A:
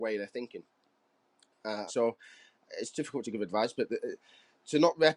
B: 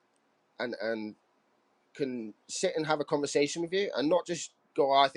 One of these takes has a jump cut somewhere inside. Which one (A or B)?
A